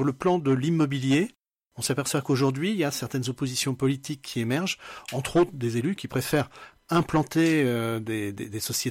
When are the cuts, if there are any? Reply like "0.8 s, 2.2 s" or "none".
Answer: none

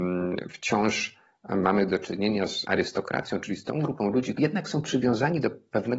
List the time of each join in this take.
2.6 s, 4.4 s

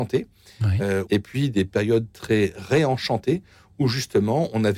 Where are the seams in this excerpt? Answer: 1.1 s

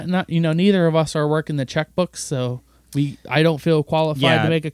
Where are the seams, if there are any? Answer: none

